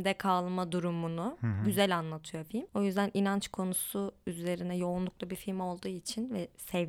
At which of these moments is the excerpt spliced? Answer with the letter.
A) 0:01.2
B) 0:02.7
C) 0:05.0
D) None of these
D